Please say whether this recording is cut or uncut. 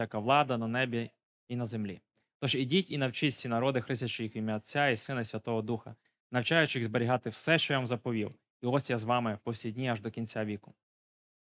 uncut